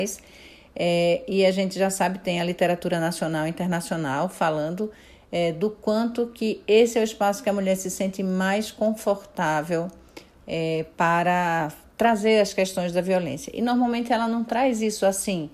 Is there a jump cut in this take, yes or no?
no